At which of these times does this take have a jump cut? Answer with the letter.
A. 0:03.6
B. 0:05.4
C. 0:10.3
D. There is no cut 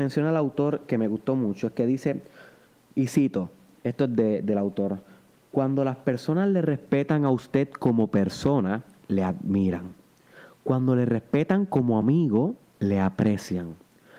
D